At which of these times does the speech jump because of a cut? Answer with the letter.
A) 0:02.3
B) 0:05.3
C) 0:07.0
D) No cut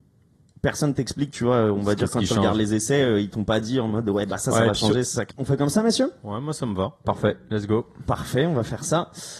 B